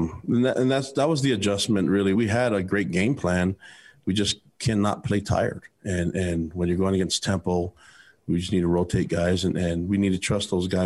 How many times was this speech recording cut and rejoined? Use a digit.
1